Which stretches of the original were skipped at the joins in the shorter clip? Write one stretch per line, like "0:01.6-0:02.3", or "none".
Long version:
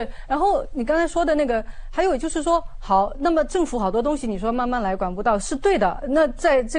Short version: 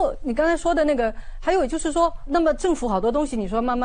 0:02.8-0:03.2